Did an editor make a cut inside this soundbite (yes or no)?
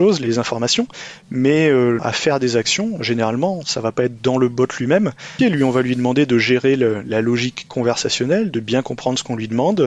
yes